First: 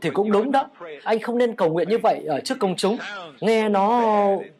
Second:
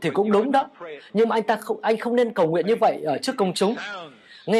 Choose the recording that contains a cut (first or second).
first